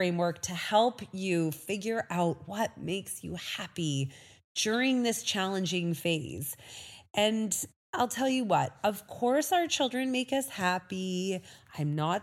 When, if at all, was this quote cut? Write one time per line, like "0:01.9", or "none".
none

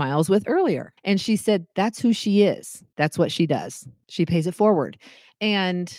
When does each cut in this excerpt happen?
0:01.0

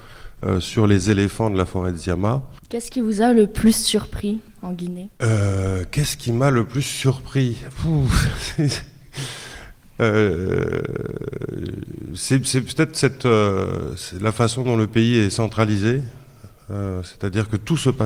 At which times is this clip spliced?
0:02.6

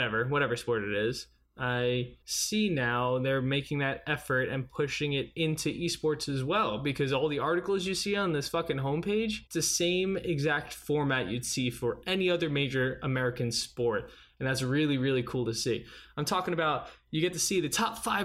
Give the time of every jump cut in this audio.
0:02.2
0:09.5

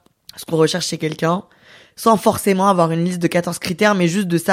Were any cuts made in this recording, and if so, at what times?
none

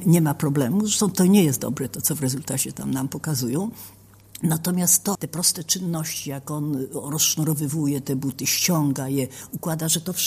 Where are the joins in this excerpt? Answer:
0:01.1
0:05.1

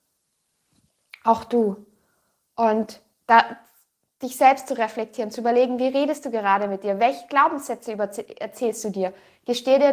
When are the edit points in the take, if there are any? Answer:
none

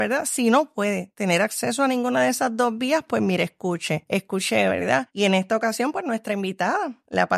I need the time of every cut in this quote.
0:05.1

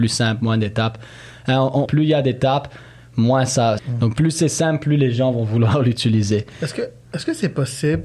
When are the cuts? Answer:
0:01.9
0:03.8

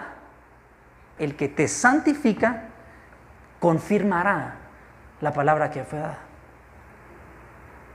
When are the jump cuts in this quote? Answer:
0:01.2

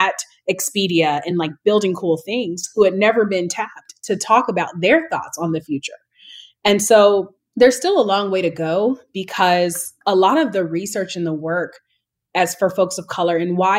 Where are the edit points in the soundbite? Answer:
none

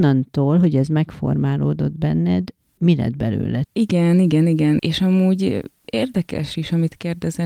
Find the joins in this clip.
0:03.6
0:04.8

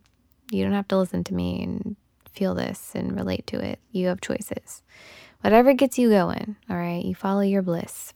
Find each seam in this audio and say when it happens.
0:03.8

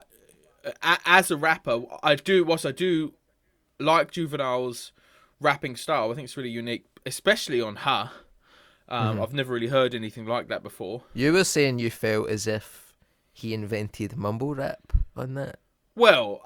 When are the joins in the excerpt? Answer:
none

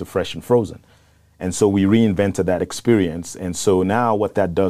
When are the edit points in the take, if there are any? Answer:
none

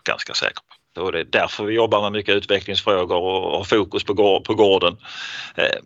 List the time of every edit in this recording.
0:01.0

